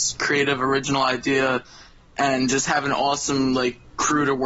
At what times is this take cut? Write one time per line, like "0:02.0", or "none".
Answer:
none